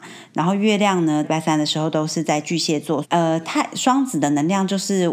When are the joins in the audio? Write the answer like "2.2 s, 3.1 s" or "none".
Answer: 1.2 s, 3.0 s